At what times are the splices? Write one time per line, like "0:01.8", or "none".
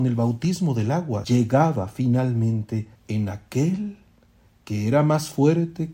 0:01.2
0:03.0